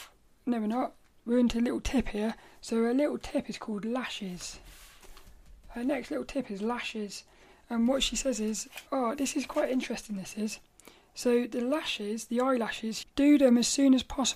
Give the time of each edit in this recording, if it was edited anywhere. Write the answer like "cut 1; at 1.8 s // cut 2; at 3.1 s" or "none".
cut 1; at 8.9 s // cut 2; at 13.0 s